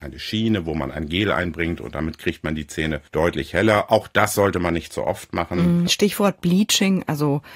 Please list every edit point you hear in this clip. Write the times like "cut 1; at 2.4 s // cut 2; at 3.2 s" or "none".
cut 1; at 3.1 s // cut 2; at 5.9 s